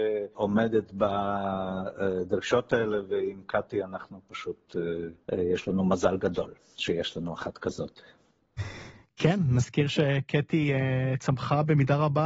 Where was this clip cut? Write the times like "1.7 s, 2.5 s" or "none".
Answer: 5.2 s